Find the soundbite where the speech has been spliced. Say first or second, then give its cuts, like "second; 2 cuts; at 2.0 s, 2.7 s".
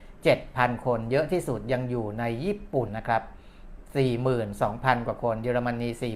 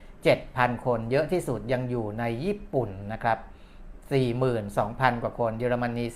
first; 1 cut; at 2.9 s